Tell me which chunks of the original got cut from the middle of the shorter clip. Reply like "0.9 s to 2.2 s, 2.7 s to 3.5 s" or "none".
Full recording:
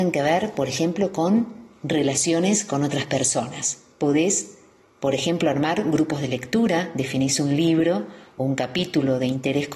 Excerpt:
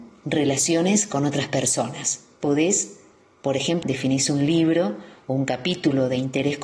5.4 s to 6.9 s

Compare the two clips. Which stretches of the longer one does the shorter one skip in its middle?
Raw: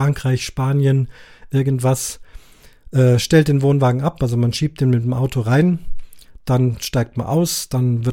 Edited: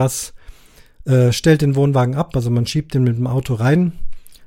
none

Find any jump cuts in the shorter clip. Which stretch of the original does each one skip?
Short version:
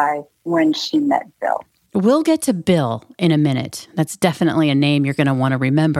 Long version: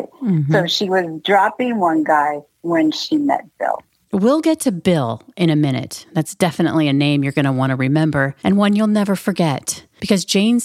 none

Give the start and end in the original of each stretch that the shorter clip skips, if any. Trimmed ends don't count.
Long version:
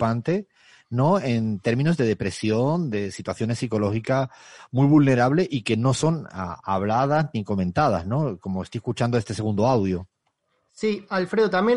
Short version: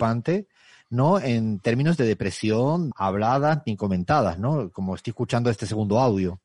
2.9 s to 6.6 s

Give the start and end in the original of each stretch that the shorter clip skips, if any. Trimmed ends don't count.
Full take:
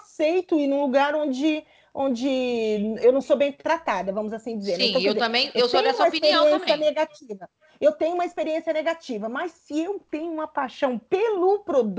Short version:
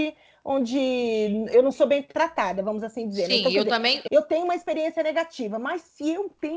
5.6 s to 7.8 s

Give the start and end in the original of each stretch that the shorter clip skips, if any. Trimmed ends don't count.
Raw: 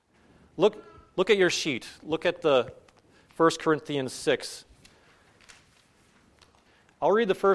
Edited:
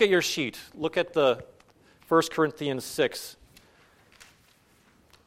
none

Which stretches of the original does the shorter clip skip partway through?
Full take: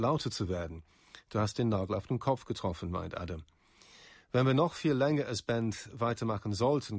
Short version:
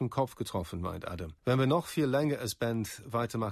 3.5 s to 4.3 s

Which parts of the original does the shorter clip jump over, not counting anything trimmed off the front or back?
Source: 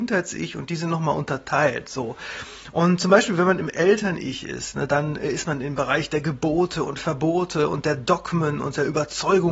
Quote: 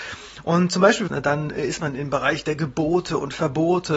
3.4 s to 4.7 s

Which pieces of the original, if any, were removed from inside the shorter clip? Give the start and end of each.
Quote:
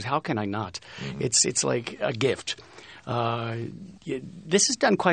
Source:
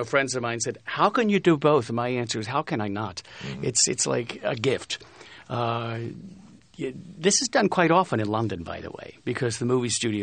6.4 s to 6.7 s

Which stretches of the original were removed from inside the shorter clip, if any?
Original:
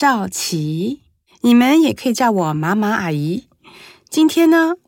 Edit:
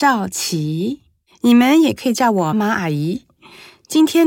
2.5 s to 2.7 s

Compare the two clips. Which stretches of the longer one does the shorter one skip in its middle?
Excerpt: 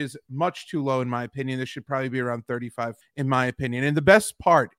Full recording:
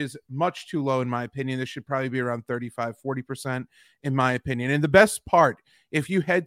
3.0 s to 3.9 s

